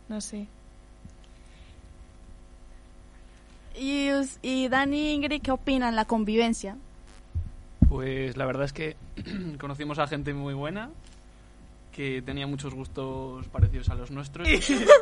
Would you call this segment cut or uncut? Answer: cut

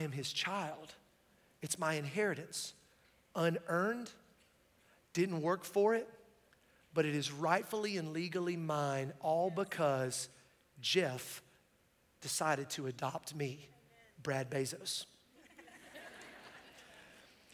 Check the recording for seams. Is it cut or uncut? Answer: uncut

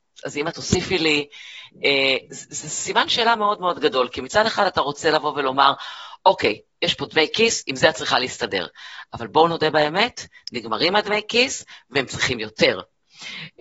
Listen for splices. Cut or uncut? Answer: uncut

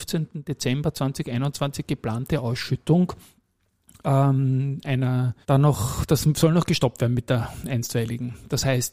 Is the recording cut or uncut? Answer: cut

